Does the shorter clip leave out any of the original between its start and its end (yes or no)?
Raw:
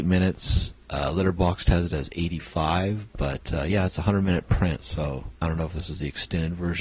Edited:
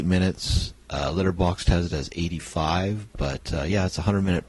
no